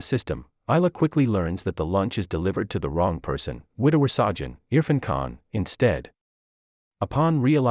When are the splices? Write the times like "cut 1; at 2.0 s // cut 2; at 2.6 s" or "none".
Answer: none